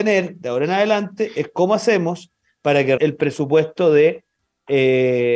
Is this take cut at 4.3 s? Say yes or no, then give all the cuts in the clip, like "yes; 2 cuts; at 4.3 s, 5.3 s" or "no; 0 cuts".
no; 1 cut; at 3.0 s